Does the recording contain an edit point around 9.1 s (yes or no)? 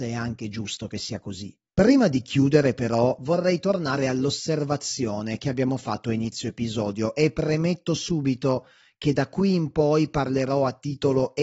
no